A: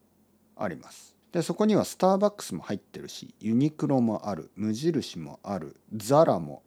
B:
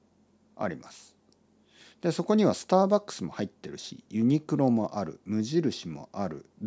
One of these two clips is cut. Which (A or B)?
A